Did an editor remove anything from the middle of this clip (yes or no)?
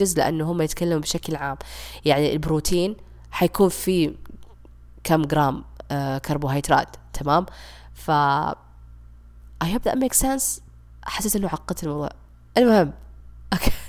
no